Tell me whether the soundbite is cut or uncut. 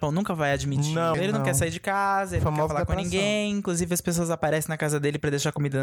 cut